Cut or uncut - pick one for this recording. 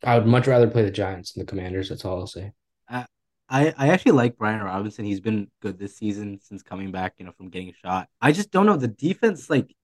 cut